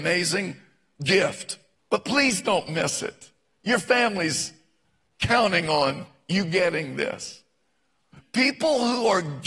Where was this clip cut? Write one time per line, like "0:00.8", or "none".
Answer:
0:01.8